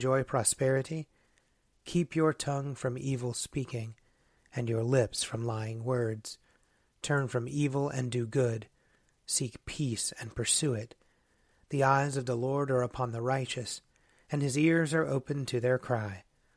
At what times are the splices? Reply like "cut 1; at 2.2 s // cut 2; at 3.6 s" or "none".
none